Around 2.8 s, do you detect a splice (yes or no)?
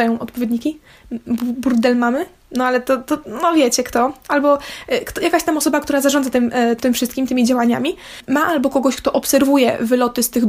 no